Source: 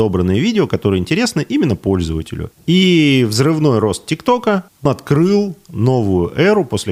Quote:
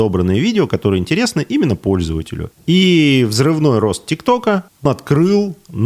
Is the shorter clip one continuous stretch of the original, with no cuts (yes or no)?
yes